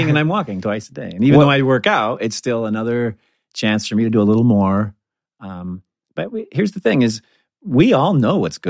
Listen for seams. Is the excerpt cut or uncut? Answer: uncut